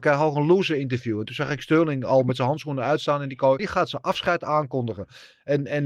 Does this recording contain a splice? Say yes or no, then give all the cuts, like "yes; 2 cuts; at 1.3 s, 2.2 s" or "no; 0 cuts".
yes; 1 cut; at 3.6 s